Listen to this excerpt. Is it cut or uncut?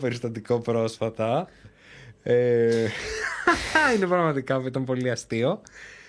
uncut